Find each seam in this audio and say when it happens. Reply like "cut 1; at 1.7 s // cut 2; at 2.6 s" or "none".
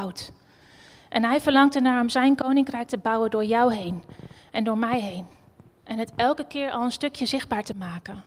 none